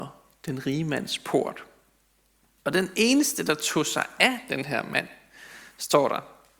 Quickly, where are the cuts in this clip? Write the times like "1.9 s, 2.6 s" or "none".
none